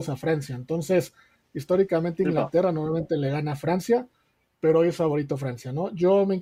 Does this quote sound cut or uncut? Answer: uncut